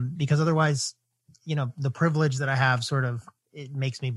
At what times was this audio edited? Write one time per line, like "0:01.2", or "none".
none